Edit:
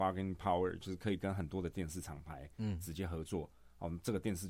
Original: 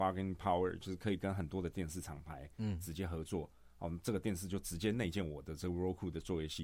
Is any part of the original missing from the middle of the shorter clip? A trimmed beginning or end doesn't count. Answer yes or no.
no